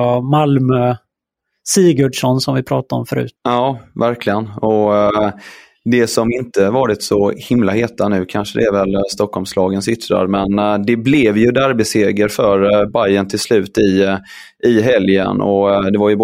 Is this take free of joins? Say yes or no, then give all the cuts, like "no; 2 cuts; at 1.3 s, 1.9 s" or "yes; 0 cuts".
no; 1 cut; at 3.4 s